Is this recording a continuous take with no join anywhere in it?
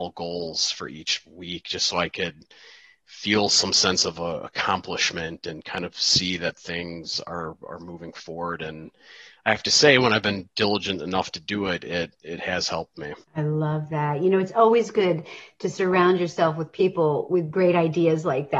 no; 1 cut; at 13.2 s

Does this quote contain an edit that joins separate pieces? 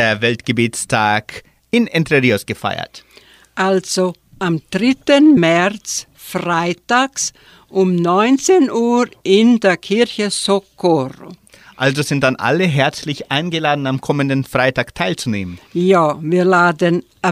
no; 0 cuts

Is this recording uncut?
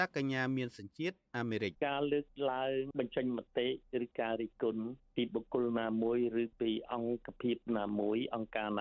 no; 1 cut; at 1.7 s

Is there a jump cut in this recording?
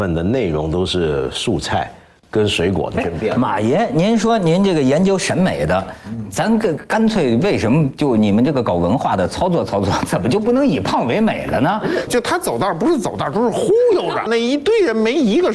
yes; 2 cuts; at 12.1 s, 14.3 s

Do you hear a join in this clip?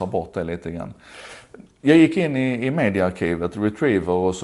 no; 0 cuts

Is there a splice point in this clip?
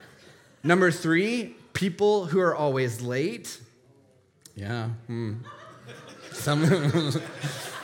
no; 0 cuts

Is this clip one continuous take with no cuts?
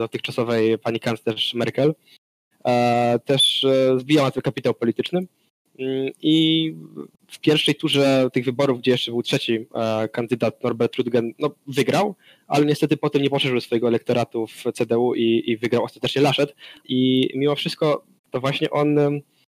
no; 2 cuts; at 16.8 s, 18.2 s

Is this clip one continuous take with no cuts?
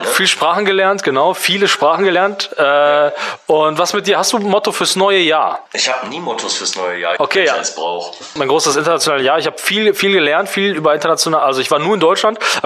no; 3 cuts; at 5.7 s, 7.2 s, 8.4 s

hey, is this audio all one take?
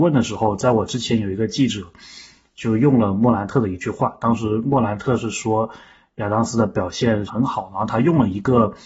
no; 1 cut; at 7.3 s

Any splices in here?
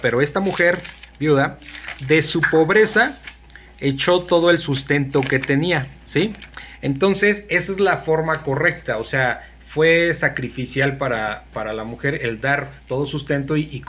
no; 0 cuts

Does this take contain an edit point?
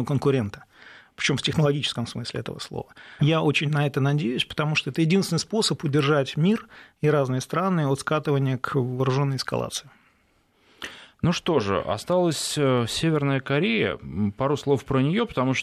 yes; 1 cut; at 3.2 s

